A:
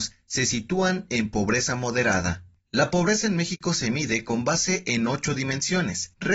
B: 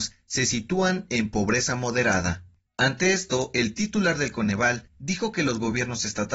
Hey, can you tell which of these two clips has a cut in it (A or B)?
A